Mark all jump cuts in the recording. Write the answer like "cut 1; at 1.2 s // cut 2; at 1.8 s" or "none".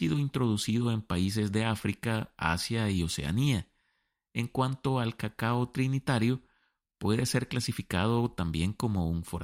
none